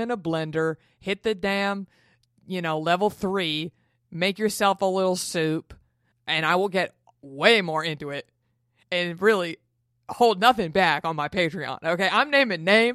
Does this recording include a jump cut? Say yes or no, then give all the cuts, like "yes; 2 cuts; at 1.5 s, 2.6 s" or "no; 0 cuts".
yes; 1 cut; at 6.1 s